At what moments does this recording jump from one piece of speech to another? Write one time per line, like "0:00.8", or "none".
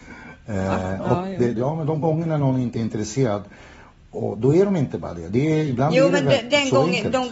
0:01.6